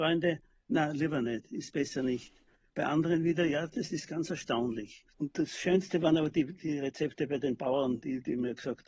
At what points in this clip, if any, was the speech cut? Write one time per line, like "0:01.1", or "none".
0:05.1